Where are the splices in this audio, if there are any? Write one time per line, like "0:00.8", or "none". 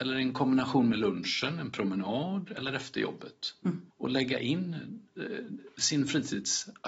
0:03.9

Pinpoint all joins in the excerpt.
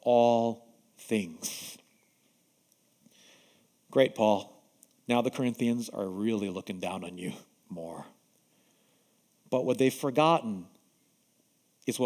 0:07.6

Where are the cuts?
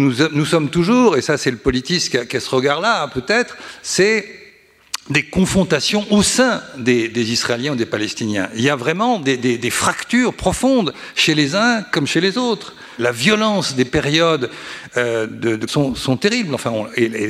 0:13.0
0:15.7

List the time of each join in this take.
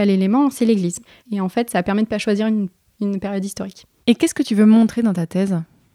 0:01.2

